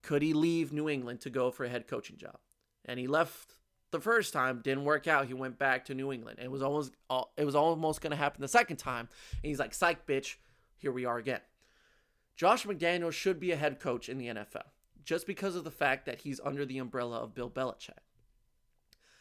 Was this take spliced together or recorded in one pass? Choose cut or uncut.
uncut